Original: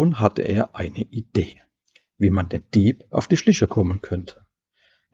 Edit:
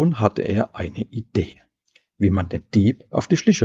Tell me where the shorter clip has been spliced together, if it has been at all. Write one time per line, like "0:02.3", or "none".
none